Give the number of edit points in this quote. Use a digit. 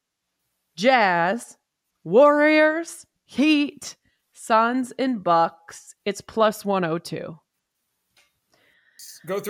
0